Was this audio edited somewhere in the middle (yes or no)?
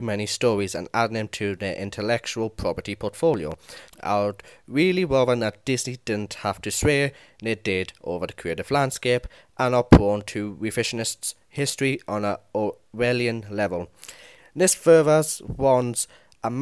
yes